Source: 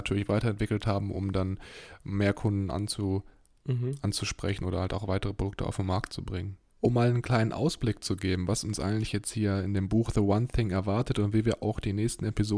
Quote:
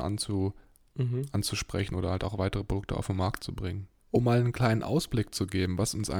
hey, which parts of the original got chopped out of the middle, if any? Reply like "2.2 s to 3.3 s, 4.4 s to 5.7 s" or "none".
none